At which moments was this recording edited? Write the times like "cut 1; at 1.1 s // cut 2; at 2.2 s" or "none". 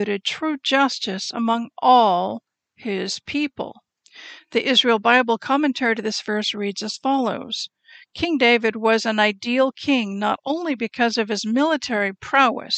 none